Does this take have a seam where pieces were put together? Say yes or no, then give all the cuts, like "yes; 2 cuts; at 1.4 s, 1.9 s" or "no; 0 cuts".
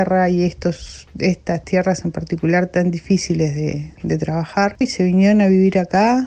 yes; 1 cut; at 4.8 s